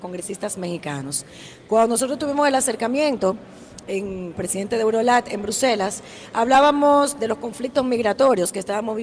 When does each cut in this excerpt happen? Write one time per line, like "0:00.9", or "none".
0:04.3